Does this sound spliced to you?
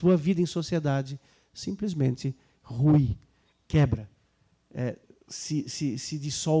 no; 0 cuts

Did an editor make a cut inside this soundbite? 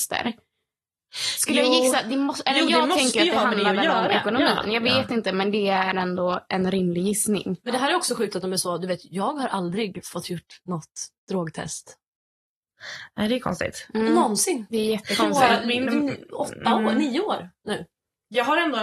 no; 0 cuts

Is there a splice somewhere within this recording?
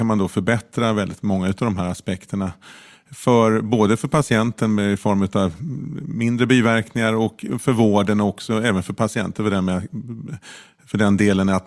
no; 0 cuts

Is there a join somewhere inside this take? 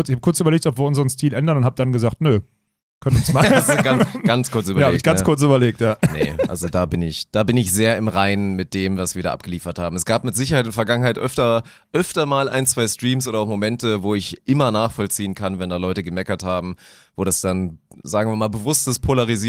no; 0 cuts

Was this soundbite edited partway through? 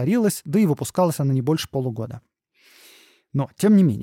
no; 0 cuts

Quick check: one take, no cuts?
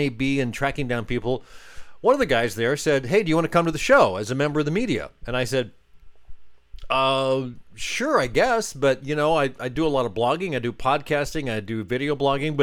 yes; 0 cuts

